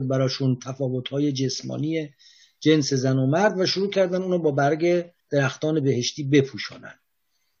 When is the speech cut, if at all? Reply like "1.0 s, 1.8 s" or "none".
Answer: 5.2 s

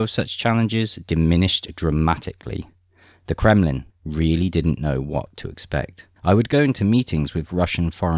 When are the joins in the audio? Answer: 3.9 s, 6.2 s

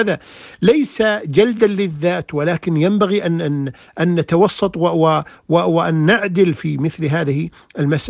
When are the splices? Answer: none

